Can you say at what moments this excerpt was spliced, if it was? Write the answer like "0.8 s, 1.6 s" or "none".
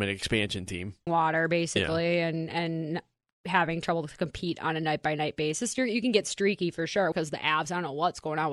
1.1 s, 7.1 s